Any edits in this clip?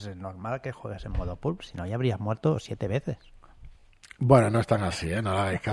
no; 0 cuts

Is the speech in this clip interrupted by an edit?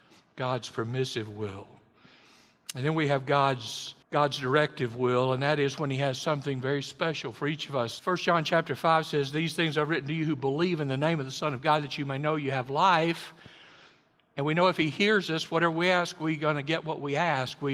yes; 2 cuts; at 4.0 s, 8.0 s

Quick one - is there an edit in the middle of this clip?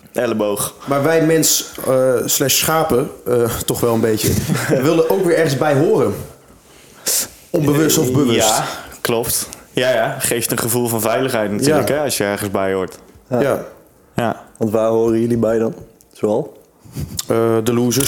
no; 0 cuts

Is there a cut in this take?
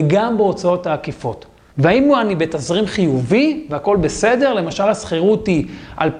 yes; 1 cut; at 1.7 s

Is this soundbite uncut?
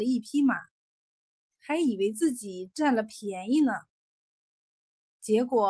yes; 0 cuts

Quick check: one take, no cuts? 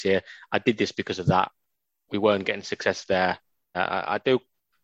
no; 1 cut; at 3.7 s

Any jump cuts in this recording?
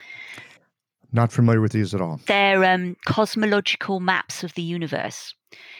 no; 0 cuts

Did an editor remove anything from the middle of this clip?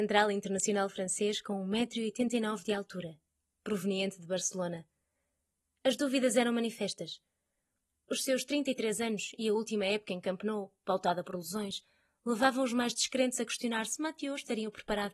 no; 0 cuts

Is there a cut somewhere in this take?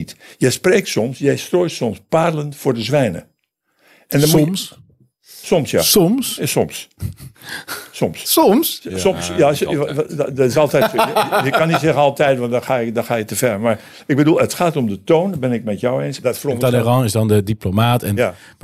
yes; 1 cut; at 16.2 s

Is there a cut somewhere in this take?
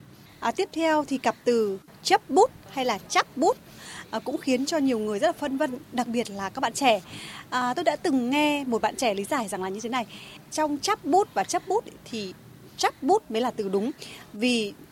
no; 0 cuts

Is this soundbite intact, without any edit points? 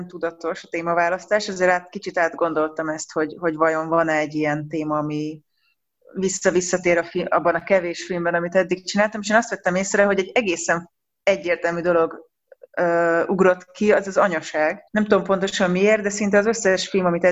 no; 1 cut; at 14.9 s

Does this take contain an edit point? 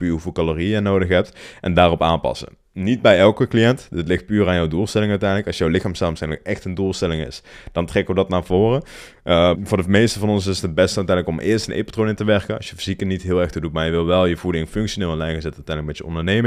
yes; 1 cut; at 9.5 s

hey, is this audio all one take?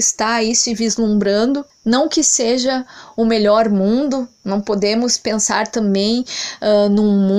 yes; 0 cuts

